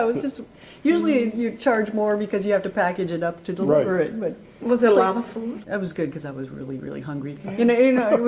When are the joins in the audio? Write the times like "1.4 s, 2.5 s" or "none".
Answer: 5.6 s